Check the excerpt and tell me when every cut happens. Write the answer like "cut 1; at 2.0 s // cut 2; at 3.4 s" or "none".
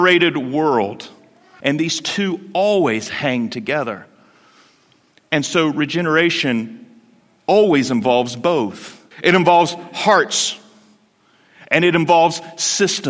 cut 1; at 1.6 s // cut 2; at 5.2 s // cut 3; at 9.1 s